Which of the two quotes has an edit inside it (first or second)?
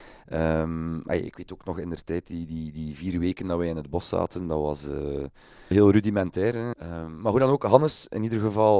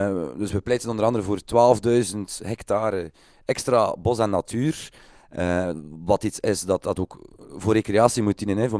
first